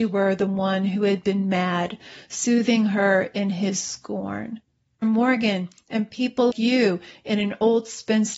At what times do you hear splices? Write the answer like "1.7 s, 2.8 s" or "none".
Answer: 5.0 s, 6.5 s